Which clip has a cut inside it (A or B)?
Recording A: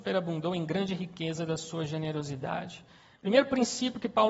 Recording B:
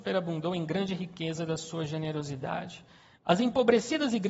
B